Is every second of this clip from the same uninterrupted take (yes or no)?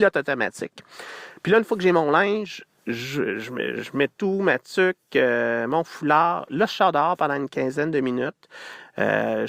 yes